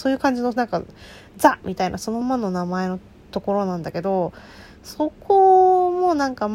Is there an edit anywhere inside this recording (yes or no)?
yes